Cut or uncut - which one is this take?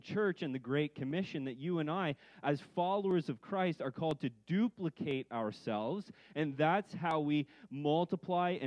uncut